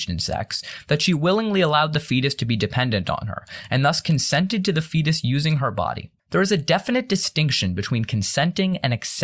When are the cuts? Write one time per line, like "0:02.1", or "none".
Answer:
0:06.2